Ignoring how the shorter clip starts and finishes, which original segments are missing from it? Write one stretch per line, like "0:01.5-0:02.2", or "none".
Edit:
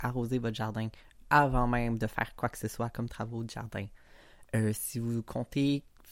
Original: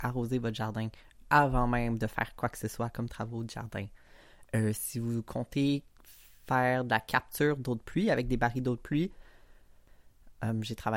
none